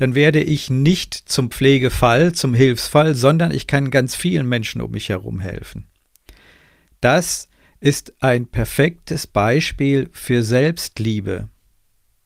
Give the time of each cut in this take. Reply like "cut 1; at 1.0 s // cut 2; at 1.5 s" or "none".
none